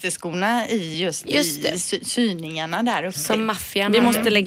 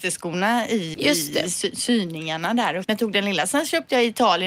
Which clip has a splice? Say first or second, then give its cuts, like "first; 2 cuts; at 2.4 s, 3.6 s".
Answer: second; 2 cuts; at 0.9 s, 2.8 s